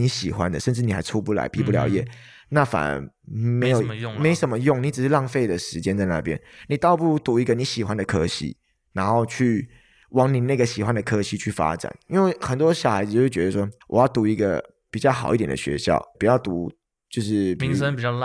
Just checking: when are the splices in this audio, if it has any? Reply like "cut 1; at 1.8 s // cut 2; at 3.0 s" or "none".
cut 1; at 13.8 s // cut 2; at 16.1 s